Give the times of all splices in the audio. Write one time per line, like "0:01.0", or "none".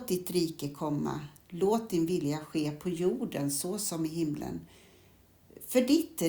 none